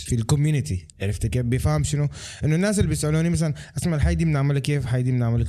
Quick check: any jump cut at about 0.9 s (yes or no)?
yes